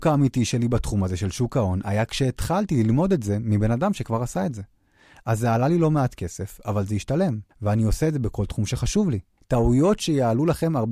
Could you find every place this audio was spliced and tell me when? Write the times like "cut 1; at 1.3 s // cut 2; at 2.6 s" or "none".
cut 1; at 7.5 s // cut 2; at 9.4 s